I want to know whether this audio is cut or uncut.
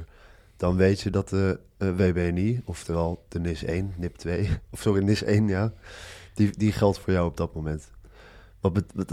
uncut